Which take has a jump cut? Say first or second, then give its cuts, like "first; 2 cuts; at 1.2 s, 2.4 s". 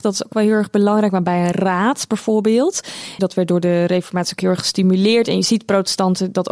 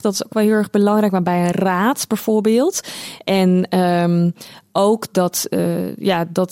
first; 1 cut; at 3.2 s